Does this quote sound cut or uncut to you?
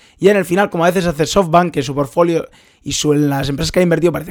uncut